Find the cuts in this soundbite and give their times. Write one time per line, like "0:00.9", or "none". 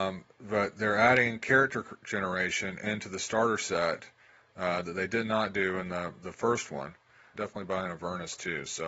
0:07.4